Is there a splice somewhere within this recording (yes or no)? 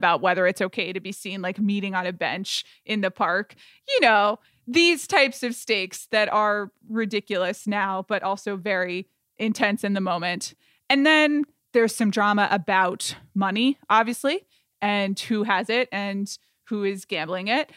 no